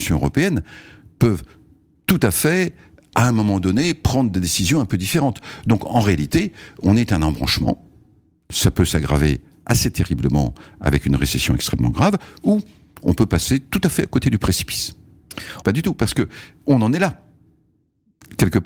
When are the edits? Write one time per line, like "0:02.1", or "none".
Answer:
0:15.6